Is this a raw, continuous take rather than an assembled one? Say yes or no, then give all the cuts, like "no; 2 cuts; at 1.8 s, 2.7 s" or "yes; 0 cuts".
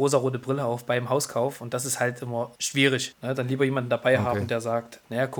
yes; 0 cuts